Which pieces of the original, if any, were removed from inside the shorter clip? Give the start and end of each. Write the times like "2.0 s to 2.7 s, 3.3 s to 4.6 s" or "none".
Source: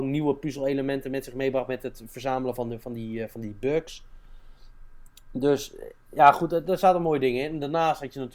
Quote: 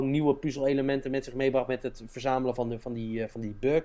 none